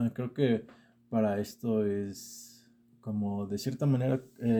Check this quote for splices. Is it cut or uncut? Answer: uncut